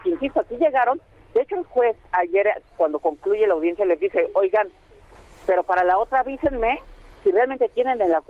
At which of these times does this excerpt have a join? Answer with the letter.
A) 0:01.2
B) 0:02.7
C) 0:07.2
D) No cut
D